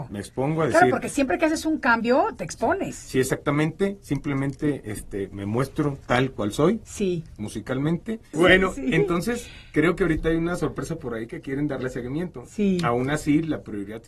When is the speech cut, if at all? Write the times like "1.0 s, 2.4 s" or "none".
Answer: 8.3 s